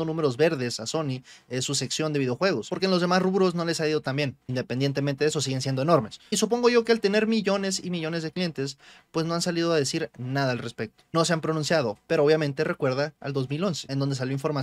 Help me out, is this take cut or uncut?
cut